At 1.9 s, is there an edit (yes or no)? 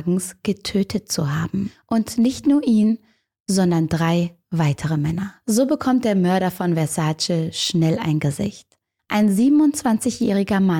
no